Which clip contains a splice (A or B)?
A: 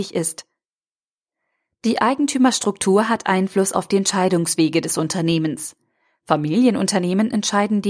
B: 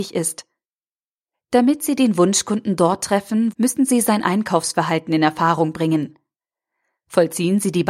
B